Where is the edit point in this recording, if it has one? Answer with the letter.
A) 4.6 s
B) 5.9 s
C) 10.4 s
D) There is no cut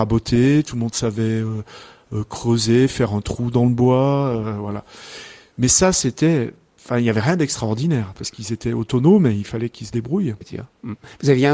C